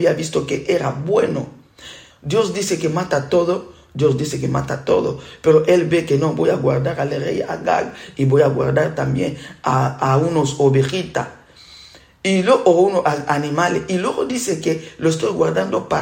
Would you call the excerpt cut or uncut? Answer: cut